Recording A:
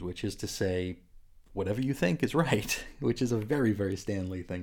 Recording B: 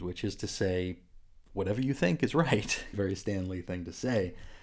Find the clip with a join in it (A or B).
B